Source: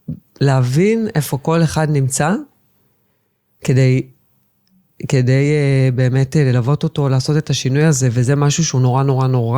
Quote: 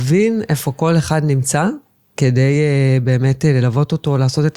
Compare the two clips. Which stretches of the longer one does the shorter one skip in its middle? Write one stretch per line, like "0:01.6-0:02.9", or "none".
0:02.8-0:05.1